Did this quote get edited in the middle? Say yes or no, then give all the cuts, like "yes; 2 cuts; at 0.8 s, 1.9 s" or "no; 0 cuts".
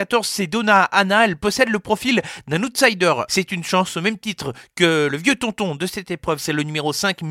yes; 2 cuts; at 3.3 s, 6.4 s